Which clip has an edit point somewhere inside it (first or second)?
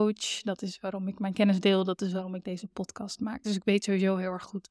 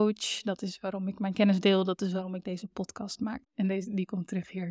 second